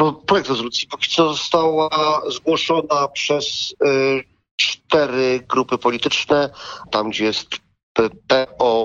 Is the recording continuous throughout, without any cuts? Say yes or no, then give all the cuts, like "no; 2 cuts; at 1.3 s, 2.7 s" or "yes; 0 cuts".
no; 1 cut; at 6.9 s